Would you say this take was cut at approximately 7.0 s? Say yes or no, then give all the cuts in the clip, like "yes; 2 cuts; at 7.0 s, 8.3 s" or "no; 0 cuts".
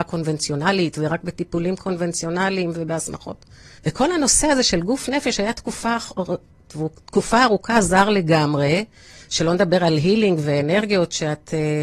no; 1 cut; at 3.8 s